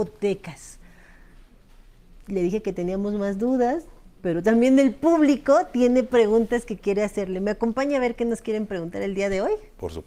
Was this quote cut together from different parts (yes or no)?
no